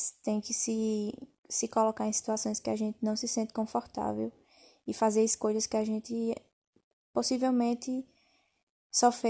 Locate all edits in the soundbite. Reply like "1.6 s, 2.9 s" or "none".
none